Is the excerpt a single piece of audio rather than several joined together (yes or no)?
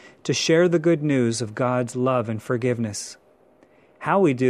yes